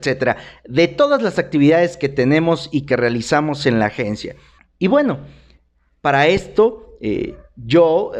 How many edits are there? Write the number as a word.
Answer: one